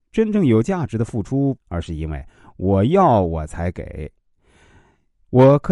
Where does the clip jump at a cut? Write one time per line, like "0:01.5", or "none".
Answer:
0:01.6